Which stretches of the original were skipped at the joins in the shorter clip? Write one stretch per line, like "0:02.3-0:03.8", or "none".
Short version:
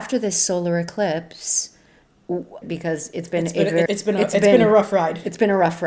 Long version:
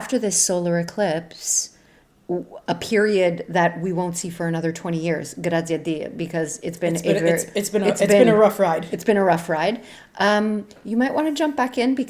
0:02.6-0:06.1
0:07.4-0:07.5